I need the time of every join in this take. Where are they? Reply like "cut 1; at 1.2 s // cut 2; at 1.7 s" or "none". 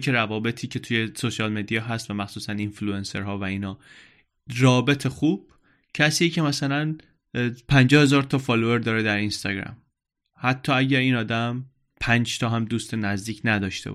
none